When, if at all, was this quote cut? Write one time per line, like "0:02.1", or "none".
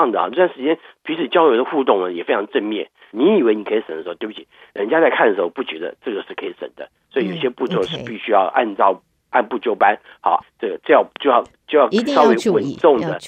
0:03.1
0:10.4